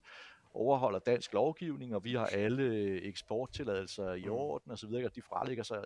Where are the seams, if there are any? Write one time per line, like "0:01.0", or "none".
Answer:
none